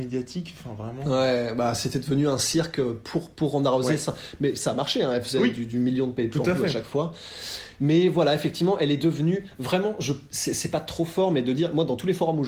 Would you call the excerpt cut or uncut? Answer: uncut